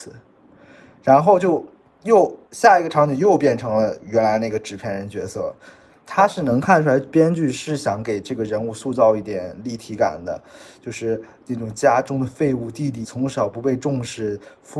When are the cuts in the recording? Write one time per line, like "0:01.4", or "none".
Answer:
0:05.9
0:13.0